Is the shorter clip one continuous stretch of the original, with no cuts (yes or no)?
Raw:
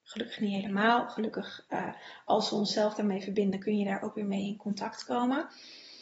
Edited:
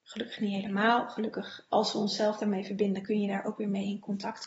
no